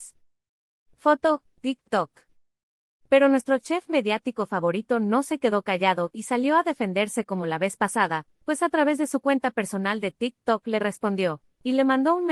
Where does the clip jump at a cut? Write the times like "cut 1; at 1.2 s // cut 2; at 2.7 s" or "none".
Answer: none